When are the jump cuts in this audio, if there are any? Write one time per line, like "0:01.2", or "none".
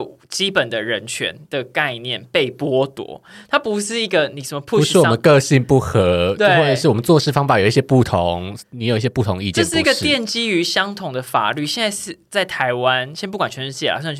none